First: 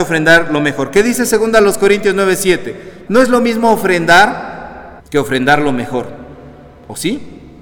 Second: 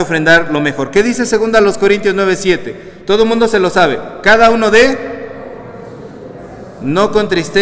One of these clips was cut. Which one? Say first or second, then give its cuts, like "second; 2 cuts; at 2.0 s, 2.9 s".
first; 2 cuts; at 3.1 s, 5.0 s